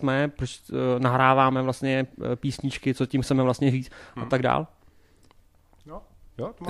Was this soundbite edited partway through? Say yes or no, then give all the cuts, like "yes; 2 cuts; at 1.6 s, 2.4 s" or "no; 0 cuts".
no; 0 cuts